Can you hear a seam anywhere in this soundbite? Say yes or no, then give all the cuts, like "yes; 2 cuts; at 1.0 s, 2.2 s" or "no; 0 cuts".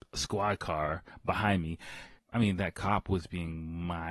yes; 1 cut; at 2.2 s